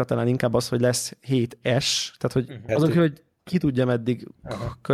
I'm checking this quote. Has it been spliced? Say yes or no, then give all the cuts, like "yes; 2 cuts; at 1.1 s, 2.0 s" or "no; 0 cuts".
yes; 1 cut; at 2.7 s